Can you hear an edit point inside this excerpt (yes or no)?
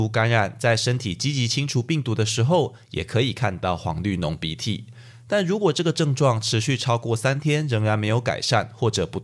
no